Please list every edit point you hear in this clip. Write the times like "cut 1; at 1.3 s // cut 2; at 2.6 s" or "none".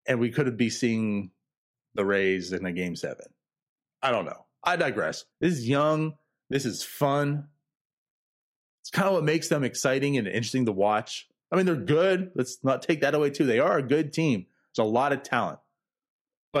cut 1; at 5.3 s